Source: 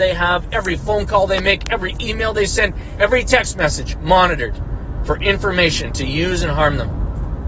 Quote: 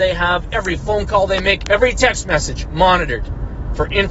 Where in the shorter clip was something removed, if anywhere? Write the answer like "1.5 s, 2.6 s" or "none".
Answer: 1.7 s